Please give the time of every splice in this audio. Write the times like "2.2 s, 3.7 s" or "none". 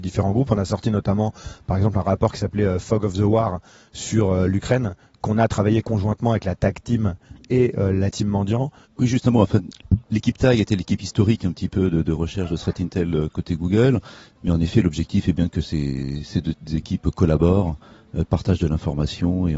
8.8 s, 14.3 s